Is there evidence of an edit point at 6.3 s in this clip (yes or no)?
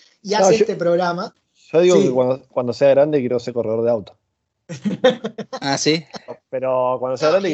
yes